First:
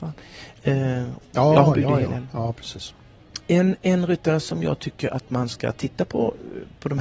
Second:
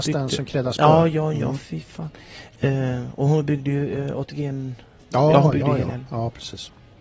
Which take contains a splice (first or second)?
first